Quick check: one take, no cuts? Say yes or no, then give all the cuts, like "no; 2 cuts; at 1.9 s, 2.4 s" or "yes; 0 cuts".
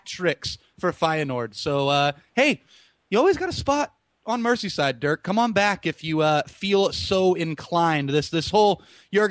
yes; 0 cuts